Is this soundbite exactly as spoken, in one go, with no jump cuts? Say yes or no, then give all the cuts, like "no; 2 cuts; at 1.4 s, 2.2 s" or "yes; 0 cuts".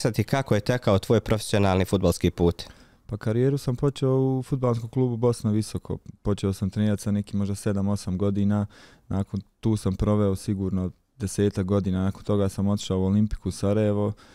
yes; 0 cuts